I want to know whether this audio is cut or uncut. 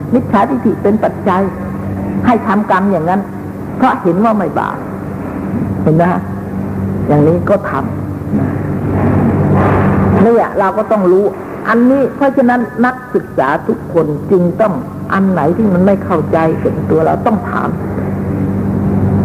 uncut